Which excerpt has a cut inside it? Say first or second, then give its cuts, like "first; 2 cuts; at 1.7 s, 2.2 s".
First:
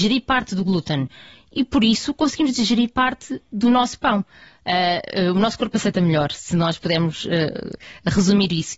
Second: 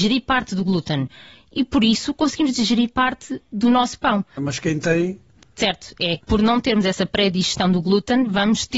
second; 2 cuts; at 4.4 s, 6.2 s